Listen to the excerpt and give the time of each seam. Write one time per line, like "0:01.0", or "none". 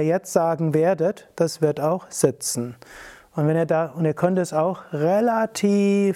none